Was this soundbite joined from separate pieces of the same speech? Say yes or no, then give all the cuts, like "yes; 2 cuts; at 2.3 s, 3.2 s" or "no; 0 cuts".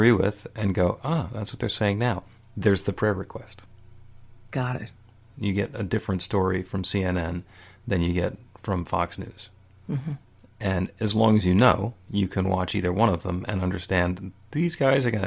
yes; 1 cut; at 5.3 s